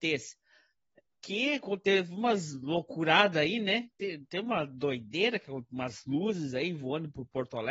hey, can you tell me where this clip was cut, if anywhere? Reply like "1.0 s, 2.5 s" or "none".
none